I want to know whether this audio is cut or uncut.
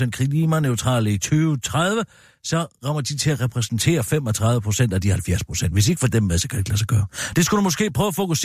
uncut